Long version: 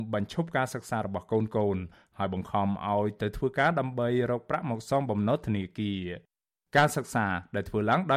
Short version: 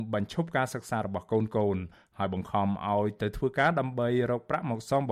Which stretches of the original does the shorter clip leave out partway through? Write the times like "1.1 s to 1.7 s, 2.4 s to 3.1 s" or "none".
none

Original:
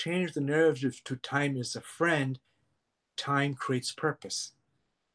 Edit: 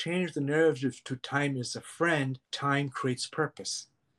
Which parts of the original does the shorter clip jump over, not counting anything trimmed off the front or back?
2.4 s to 3.1 s

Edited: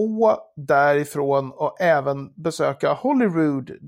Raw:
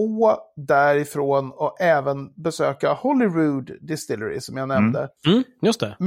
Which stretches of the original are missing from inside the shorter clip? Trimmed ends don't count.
none

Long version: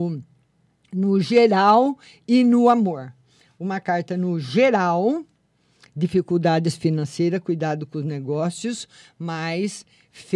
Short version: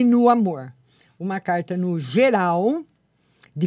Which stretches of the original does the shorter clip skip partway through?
none

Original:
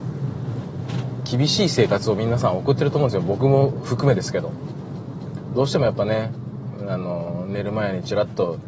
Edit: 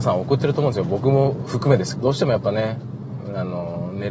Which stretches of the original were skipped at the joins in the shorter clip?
4.3 s to 5.5 s

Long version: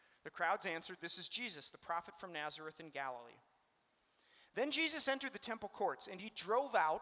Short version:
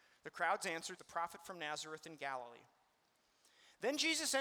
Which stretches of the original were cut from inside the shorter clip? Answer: 1.0 s to 1.7 s

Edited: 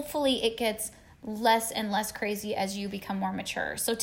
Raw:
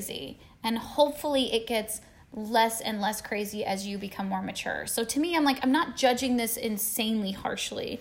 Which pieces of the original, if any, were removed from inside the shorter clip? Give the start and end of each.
none

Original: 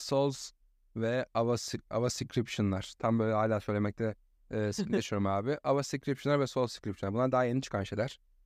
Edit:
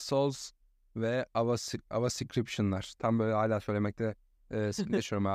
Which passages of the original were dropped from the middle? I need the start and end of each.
none

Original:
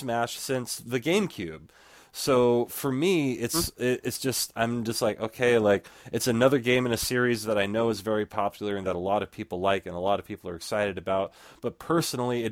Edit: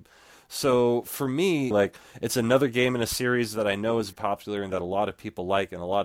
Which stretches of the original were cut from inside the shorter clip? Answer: 3.3 s to 5.6 s, 8.0 s to 8.3 s

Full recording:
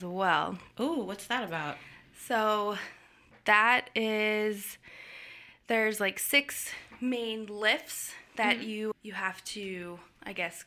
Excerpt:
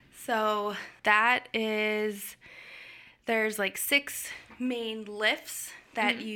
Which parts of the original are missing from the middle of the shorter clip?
3.0 s to 3.4 s

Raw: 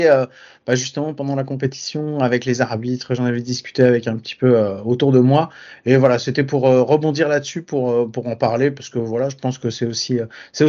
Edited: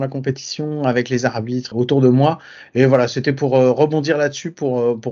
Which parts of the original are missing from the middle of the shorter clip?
3.1 s to 4.8 s

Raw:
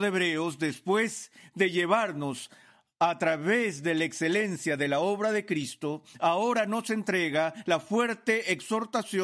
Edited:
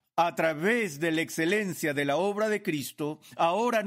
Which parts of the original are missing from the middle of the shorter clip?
none

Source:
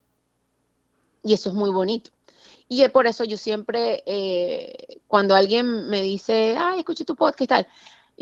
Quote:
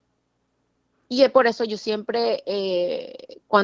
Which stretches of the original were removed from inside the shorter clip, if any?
1.1 s to 2.7 s

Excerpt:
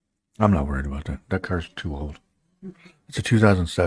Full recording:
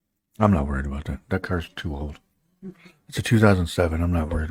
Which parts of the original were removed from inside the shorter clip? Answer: none

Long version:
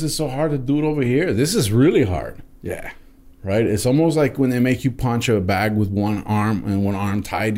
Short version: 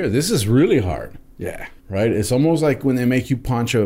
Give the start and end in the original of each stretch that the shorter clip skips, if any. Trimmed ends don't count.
3.0 s to 3.3 s

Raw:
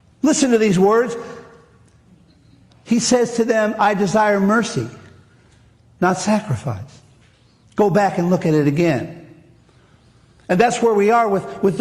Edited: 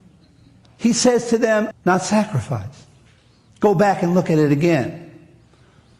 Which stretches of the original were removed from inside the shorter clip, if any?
3.8 s to 5.9 s

